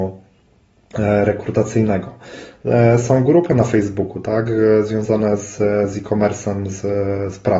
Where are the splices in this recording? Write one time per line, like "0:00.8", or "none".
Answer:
none